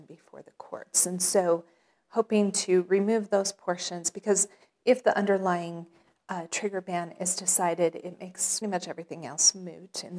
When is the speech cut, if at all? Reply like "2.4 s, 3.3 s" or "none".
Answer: 8.6 s